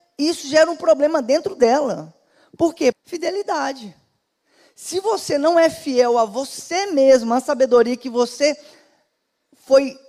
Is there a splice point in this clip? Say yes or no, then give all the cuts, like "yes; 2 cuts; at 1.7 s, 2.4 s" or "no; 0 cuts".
yes; 1 cut; at 2.9 s